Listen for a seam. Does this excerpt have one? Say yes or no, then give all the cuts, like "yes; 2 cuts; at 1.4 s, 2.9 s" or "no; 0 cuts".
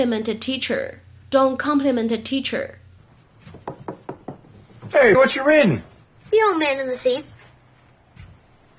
yes; 1 cut; at 5.1 s